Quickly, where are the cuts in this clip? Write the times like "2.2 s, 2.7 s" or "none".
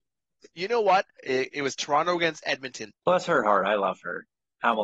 1.2 s, 2.9 s